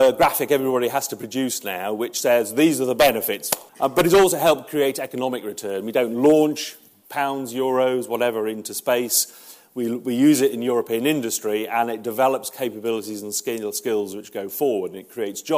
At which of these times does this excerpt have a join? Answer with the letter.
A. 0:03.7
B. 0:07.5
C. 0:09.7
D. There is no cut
A